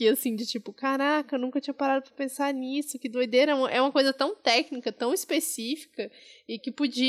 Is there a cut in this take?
no; 0 cuts

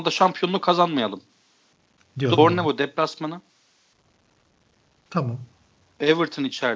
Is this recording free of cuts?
no; 1 cut; at 2.4 s

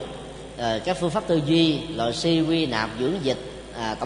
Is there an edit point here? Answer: no; 0 cuts

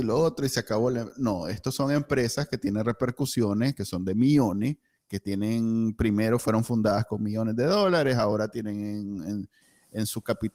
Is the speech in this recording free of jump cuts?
yes; 0 cuts

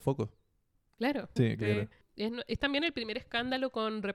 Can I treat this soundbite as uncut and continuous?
no; 1 cut; at 1.4 s

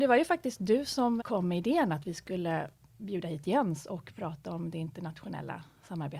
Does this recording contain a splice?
yes; 1 cut; at 1.2 s

